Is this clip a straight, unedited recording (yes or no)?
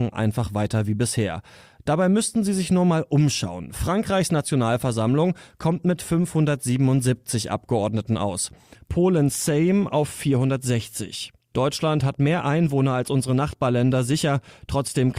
yes